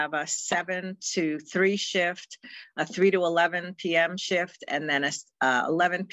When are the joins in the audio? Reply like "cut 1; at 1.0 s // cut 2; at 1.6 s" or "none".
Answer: none